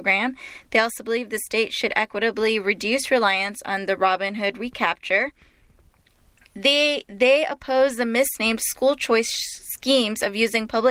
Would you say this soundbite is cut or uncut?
uncut